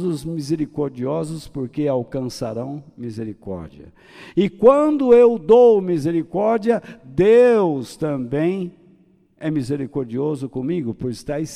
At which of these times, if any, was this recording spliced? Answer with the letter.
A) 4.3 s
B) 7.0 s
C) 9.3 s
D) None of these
A